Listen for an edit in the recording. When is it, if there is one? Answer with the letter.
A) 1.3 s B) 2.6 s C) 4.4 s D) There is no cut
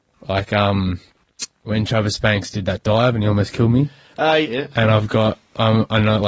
C